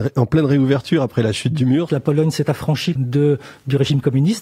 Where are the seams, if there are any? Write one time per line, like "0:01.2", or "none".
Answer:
0:01.9
0:03.0